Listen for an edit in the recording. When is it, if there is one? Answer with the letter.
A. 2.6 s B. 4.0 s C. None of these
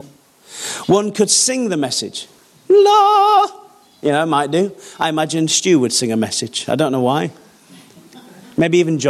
C